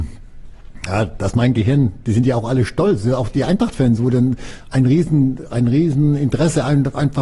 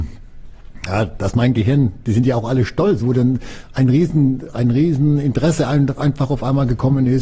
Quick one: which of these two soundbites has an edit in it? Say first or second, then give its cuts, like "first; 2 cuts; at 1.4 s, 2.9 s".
second; 1 cut; at 3.0 s